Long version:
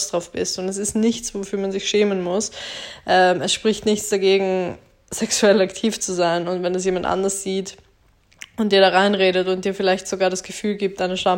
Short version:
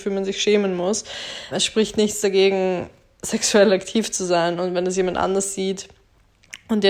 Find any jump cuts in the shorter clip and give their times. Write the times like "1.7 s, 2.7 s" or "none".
1.5 s